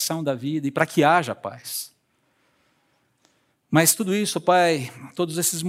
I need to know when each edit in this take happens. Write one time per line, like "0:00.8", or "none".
none